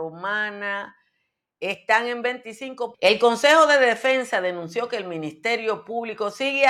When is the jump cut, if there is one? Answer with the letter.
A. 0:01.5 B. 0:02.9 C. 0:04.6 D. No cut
B